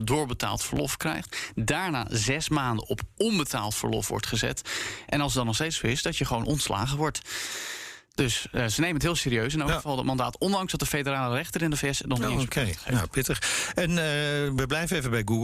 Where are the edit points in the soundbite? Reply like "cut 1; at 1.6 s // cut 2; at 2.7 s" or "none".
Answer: none